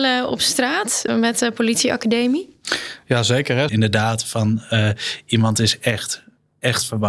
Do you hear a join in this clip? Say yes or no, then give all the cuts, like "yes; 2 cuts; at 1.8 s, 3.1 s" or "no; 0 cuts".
yes; 2 cuts; at 1.1 s, 3.7 s